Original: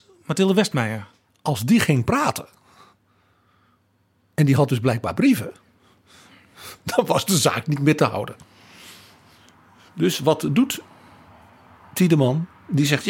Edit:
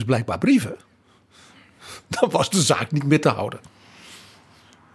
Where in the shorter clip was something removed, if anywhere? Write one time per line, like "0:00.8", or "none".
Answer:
none

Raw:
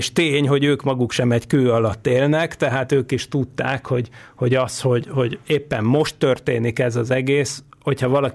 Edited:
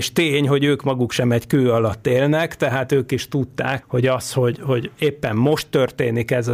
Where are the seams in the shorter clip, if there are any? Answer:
0:03.8

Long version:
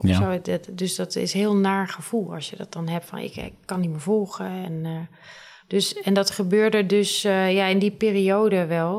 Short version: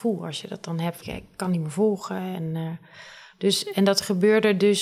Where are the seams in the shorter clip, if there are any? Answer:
0:01.0

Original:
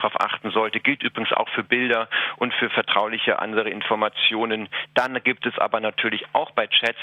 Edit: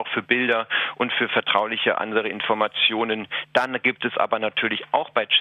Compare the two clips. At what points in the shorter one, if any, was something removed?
none

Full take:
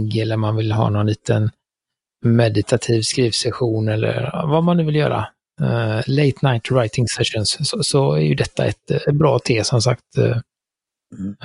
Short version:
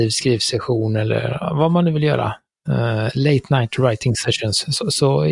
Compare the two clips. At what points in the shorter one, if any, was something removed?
none

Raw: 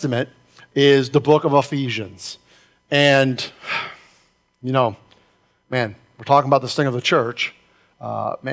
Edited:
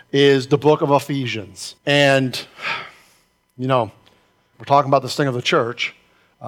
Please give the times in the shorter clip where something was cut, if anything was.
0:01.8
0:04.5

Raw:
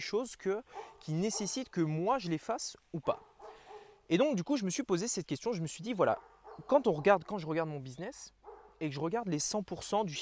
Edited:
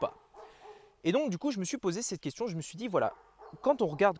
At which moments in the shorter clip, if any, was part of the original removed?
none

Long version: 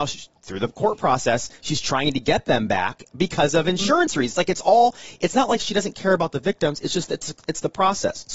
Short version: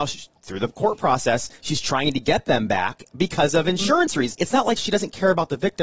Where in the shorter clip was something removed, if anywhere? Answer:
0:04.3

